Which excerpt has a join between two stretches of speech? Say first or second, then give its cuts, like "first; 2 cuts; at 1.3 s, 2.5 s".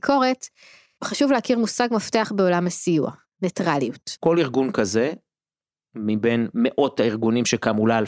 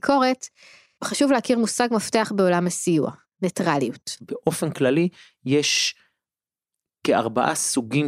first; 1 cut; at 4.2 s